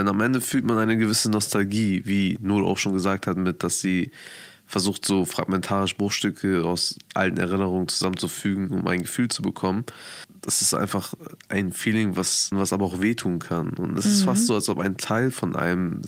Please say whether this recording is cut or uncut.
cut